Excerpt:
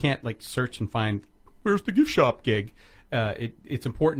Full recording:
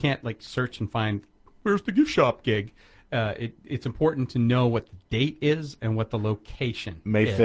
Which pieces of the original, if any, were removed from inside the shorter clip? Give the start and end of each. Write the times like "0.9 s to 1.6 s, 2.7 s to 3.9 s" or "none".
none